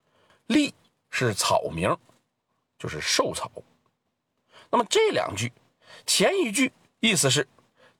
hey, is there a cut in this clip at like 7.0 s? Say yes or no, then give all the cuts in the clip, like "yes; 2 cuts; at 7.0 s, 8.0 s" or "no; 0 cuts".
yes; 1 cut; at 7.0 s